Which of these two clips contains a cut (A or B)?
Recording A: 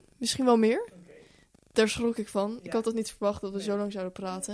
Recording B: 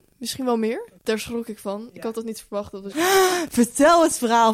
B